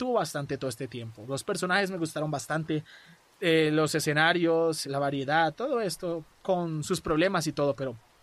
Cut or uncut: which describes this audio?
cut